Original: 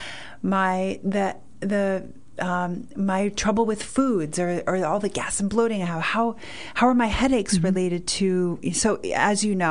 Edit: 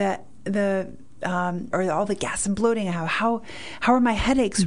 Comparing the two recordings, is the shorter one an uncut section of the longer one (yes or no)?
no